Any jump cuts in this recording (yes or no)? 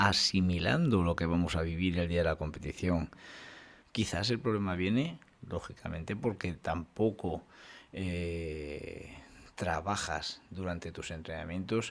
yes